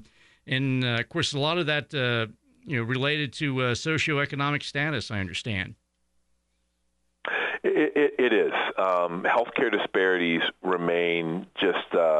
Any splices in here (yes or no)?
no